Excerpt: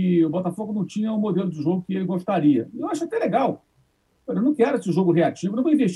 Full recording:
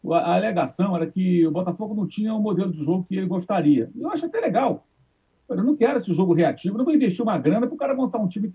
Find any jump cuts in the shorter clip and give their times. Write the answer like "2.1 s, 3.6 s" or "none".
none